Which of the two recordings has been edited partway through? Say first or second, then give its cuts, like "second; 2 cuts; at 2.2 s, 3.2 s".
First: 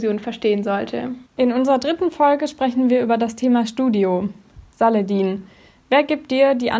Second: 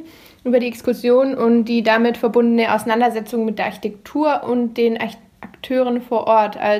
first; 1 cut; at 1.3 s